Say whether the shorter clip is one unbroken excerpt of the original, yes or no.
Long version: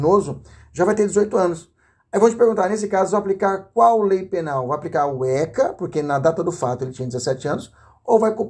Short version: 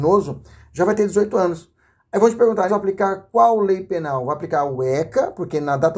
no